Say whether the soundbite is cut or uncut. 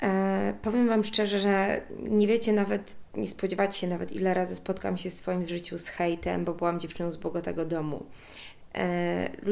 uncut